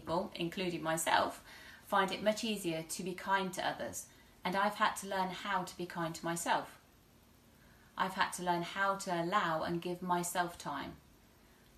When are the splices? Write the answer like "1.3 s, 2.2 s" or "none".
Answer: none